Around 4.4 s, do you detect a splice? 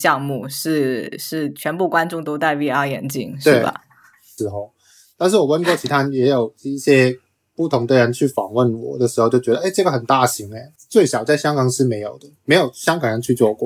yes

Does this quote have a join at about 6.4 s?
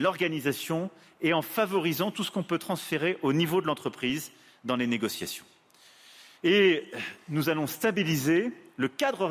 yes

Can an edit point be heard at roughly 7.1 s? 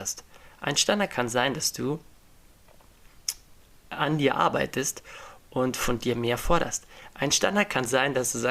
no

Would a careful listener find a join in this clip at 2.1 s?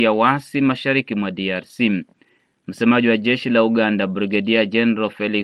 no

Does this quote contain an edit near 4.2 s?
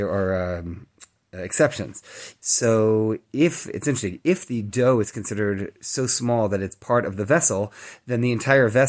no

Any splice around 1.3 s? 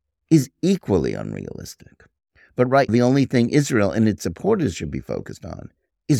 no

